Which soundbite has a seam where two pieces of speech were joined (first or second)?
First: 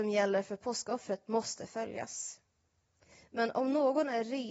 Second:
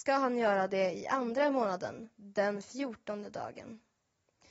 second